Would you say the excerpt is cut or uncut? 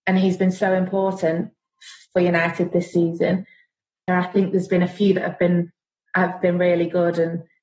cut